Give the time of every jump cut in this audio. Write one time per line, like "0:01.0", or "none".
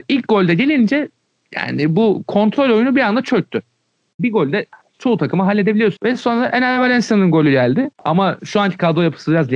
0:04.2
0:06.0
0:07.9